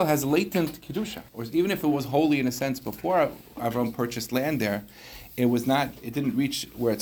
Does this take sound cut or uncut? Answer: cut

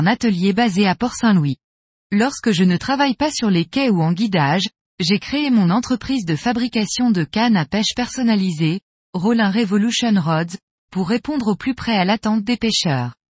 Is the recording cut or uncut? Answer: cut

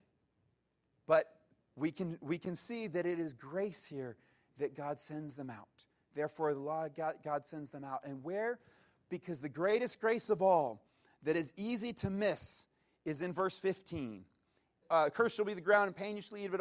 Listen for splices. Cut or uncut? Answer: cut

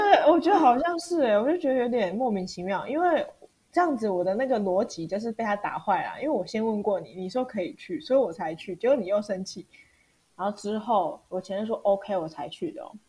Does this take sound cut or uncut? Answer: cut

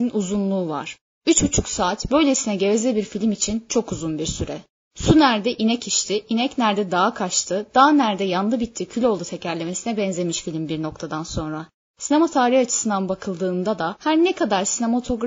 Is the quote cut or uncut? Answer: uncut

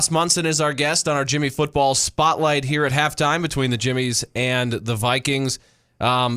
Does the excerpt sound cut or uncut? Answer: uncut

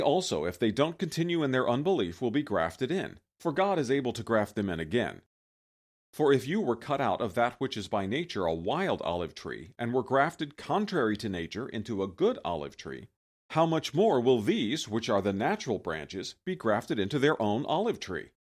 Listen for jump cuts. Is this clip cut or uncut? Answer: uncut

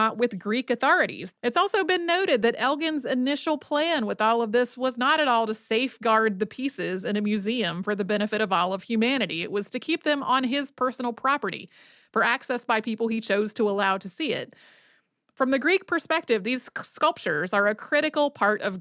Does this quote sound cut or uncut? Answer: cut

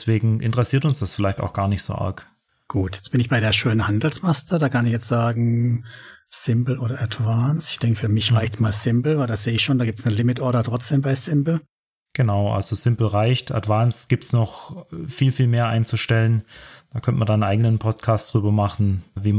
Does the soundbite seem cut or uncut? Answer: uncut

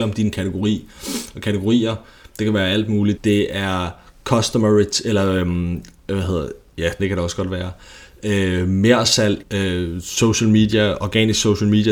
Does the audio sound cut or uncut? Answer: cut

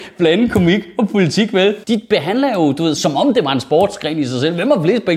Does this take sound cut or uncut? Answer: cut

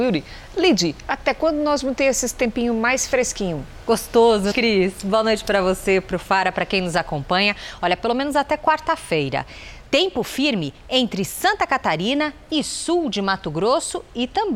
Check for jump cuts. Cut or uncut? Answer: cut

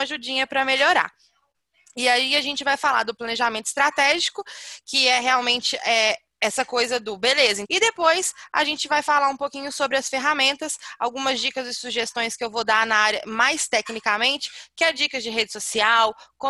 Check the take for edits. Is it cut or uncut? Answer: cut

